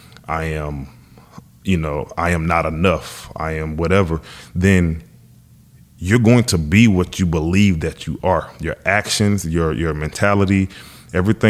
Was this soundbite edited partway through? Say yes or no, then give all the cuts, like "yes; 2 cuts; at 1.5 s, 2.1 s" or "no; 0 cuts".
no; 0 cuts